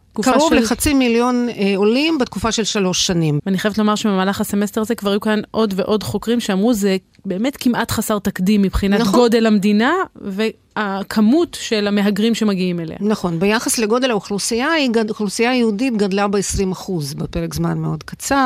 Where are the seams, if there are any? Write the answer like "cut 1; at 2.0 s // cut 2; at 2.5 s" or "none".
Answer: cut 1; at 3.4 s